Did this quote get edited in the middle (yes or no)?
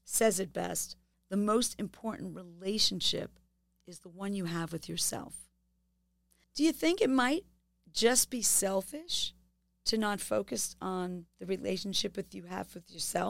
yes